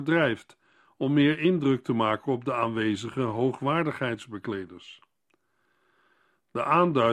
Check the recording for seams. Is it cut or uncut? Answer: uncut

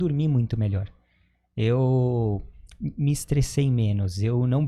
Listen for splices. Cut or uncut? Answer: uncut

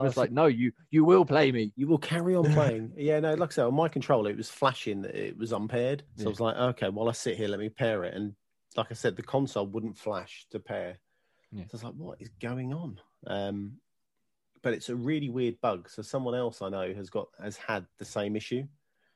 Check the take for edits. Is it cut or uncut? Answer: cut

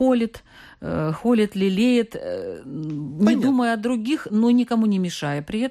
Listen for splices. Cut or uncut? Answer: uncut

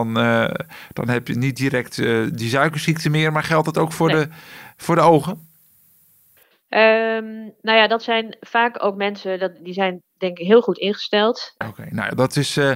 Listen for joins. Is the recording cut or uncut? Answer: cut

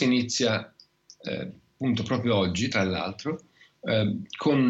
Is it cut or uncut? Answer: uncut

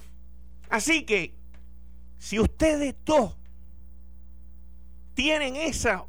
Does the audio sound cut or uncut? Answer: uncut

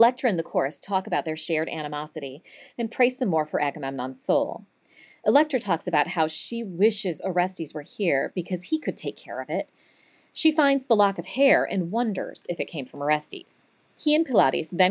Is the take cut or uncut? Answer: uncut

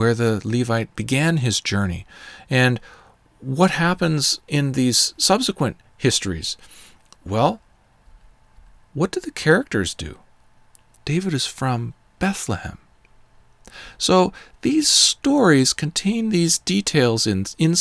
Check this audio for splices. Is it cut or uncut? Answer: cut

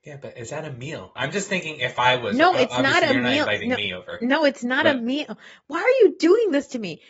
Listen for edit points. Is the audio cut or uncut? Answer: cut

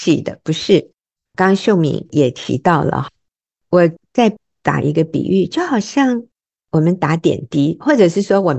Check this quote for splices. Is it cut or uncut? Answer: cut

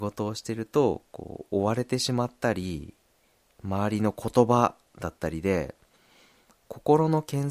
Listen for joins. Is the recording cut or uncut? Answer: uncut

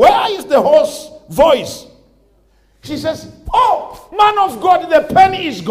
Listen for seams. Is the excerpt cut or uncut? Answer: uncut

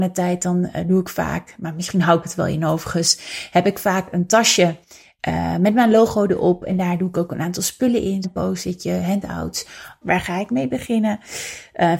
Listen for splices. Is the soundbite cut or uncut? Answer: cut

